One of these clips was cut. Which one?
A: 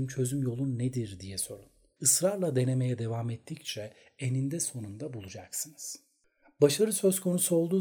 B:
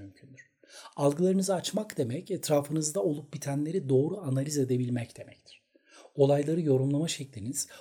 A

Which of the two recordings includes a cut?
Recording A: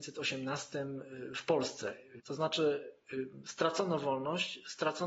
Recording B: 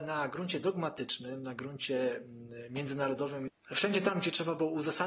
A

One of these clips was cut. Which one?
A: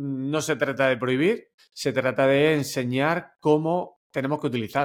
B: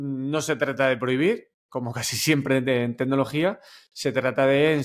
A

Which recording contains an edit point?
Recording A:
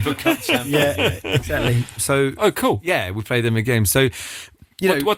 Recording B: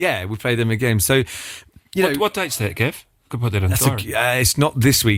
A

